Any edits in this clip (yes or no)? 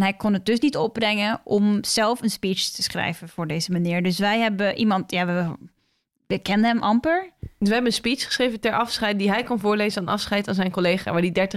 no